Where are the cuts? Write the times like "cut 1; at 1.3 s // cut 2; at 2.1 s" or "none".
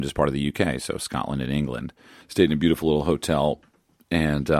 cut 1; at 2.2 s

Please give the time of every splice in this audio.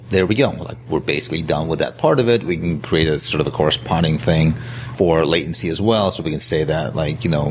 none

